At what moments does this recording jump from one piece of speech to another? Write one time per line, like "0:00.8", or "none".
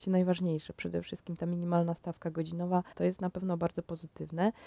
0:02.9